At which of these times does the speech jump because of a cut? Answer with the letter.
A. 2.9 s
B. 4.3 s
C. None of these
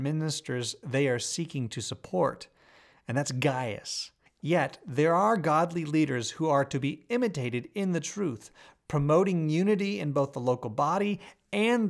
B